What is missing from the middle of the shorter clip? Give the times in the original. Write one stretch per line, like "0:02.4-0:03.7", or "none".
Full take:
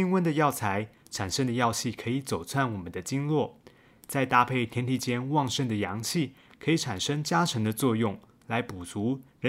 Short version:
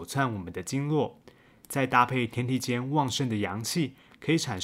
none